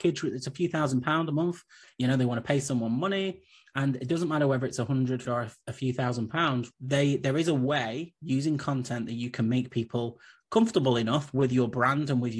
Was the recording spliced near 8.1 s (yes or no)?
no